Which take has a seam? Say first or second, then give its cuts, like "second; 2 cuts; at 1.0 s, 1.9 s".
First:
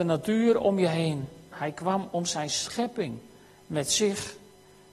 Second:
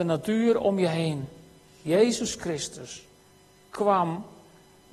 first; 1 cut; at 1.5 s